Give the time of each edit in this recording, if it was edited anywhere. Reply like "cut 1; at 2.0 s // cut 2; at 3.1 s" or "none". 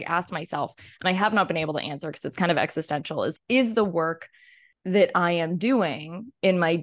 cut 1; at 3.4 s